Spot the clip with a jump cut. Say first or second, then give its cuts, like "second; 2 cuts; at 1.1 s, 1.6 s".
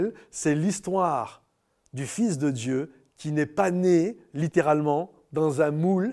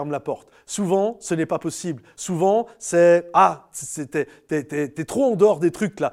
second; 1 cut; at 2.1 s